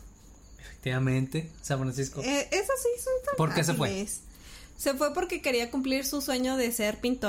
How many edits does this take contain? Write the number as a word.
zero